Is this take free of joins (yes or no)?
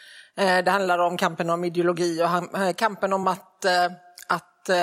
yes